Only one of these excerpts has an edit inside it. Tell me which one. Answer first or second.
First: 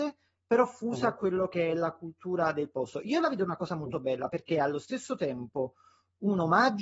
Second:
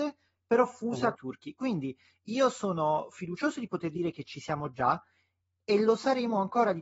second